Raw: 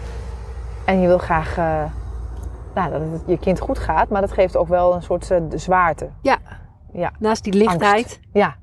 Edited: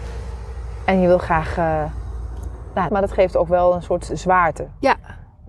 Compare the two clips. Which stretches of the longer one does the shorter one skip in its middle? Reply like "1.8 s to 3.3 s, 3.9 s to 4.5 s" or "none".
2.9 s to 4.1 s, 5.3 s to 5.5 s